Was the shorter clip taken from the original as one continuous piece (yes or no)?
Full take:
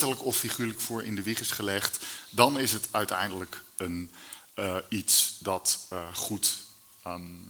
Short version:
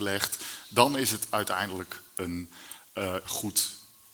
no